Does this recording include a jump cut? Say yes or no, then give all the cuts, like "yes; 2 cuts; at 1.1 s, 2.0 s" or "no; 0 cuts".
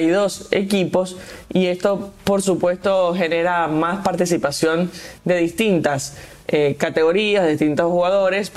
no; 0 cuts